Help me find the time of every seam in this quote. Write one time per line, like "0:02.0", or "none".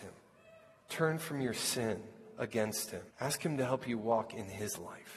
0:03.1

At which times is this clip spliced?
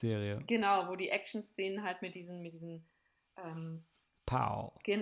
none

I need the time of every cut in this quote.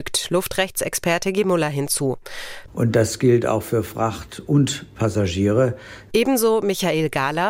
0:02.7
0:06.1

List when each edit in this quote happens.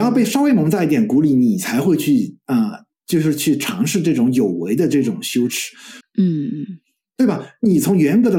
0:06.0

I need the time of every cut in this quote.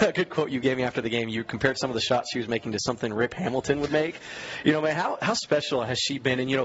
none

